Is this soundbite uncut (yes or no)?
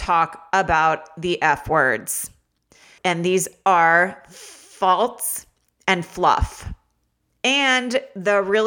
no